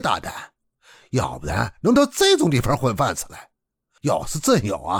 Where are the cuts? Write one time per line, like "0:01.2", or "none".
0:04.0